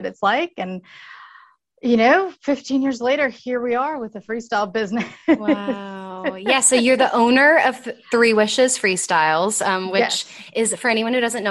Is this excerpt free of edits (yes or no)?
yes